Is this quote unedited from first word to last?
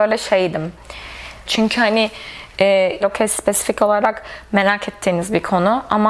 no; 2 cuts; at 1.4 s, 3.0 s

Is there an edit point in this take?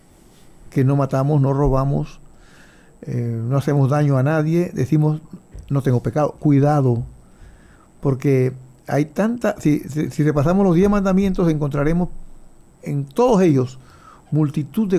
no; 0 cuts

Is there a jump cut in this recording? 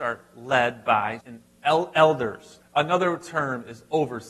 yes; 2 cuts; at 1.2 s, 2.6 s

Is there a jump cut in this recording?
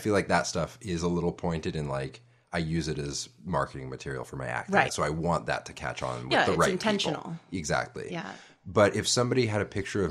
yes; 1 cut; at 4.9 s

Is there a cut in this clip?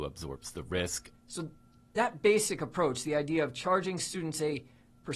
yes; 1 cut; at 1.1 s

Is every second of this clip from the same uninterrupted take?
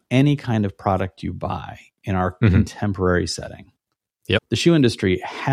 no; 1 cut; at 4.4 s

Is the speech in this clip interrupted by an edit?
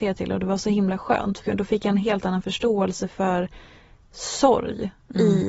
yes; 1 cut; at 1.4 s

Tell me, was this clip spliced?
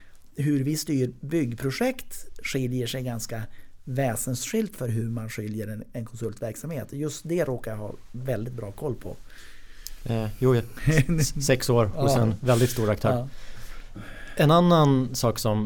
no; 0 cuts

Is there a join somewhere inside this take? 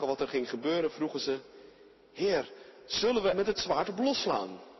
yes; 1 cut; at 3.3 s

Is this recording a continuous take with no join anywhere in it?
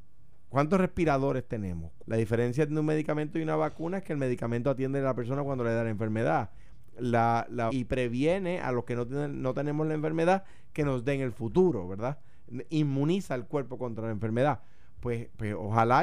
no; 2 cuts; at 2.0 s, 7.7 s

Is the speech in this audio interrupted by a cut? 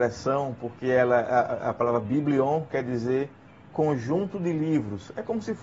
no; 0 cuts

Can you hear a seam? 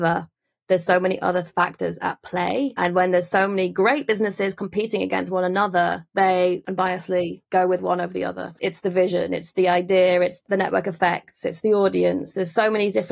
yes; 1 cut; at 8.6 s

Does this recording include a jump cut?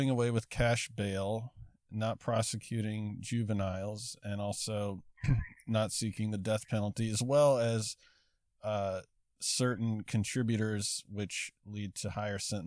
no; 0 cuts

